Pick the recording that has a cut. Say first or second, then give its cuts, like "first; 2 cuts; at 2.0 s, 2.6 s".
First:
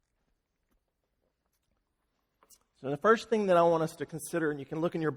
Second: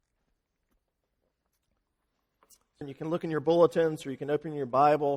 second; 1 cut; at 2.8 s